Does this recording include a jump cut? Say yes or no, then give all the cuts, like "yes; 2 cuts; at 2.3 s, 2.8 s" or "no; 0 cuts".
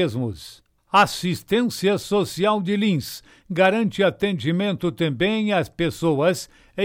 no; 0 cuts